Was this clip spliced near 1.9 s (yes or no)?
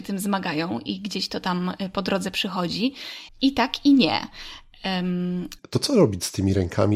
no